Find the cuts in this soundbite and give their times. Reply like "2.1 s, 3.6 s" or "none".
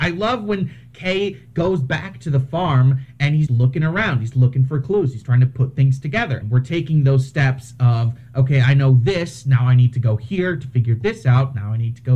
3.5 s, 6.4 s